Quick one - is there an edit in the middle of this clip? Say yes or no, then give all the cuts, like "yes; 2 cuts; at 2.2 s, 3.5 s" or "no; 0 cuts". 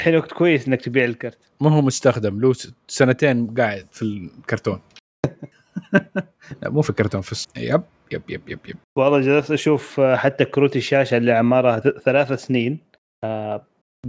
yes; 2 cuts; at 7.4 s, 11.8 s